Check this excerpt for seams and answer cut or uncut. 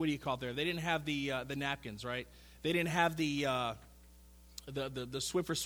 uncut